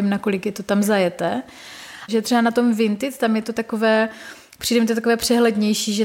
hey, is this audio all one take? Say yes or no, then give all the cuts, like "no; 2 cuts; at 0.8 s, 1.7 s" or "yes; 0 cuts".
no; 1 cut; at 2.1 s